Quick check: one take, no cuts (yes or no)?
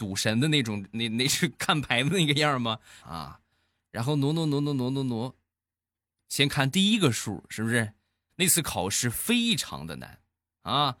no